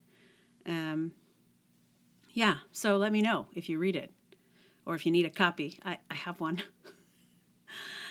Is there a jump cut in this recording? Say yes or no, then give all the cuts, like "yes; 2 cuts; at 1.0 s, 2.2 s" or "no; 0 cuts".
no; 0 cuts